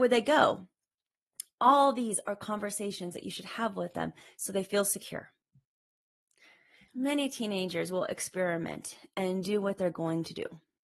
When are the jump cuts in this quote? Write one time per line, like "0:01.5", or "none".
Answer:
0:06.9